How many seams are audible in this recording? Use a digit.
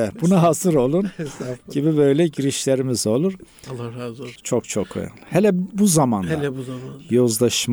1